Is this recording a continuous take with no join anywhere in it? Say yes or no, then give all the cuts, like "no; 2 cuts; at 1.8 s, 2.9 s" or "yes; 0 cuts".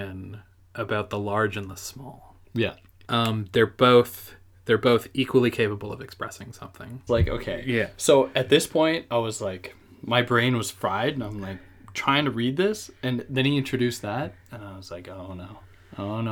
no; 2 cuts; at 3.0 s, 7.1 s